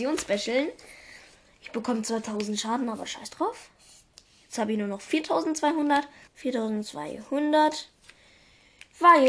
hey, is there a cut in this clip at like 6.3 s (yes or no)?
yes